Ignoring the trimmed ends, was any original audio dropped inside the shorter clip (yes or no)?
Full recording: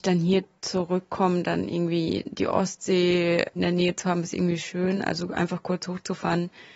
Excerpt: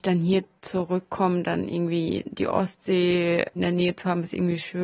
no